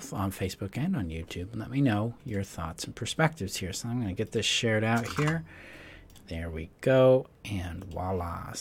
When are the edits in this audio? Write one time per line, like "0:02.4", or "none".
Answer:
none